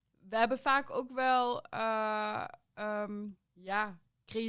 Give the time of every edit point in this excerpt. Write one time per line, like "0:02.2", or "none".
0:03.4